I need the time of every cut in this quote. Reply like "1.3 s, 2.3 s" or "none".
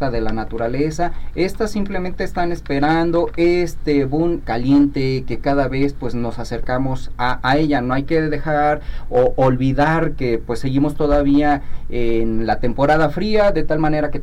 4.4 s